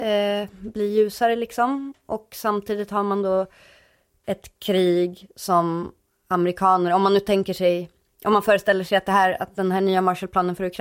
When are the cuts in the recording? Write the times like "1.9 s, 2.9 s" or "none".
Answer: none